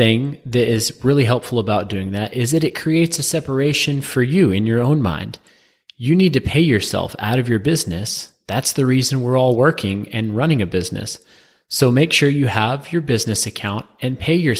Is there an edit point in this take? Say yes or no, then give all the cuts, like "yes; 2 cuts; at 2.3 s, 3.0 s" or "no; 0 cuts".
no; 0 cuts